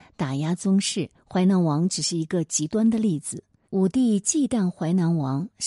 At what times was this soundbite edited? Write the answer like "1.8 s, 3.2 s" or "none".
3.6 s